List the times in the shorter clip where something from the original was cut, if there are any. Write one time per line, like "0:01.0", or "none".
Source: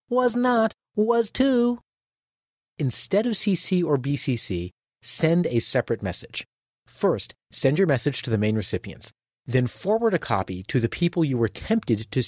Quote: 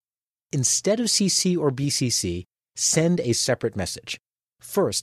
none